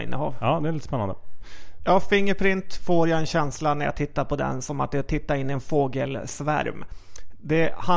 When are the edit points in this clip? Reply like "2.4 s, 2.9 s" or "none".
1.8 s